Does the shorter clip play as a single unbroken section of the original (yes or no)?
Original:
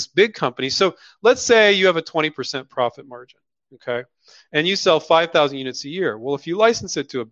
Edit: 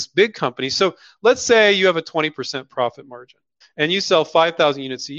no